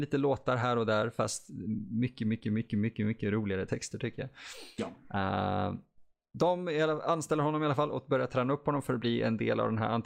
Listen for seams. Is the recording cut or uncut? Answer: uncut